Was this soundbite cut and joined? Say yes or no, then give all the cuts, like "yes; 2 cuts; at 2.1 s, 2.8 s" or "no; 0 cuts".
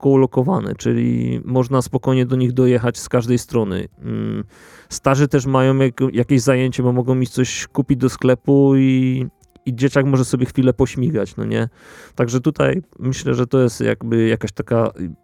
no; 0 cuts